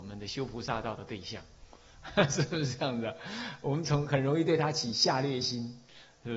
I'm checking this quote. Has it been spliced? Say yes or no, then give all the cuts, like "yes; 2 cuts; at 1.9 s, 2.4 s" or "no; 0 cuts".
no; 0 cuts